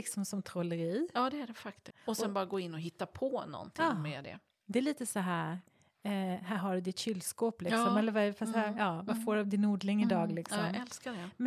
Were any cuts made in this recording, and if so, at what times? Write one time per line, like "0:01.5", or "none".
0:01.9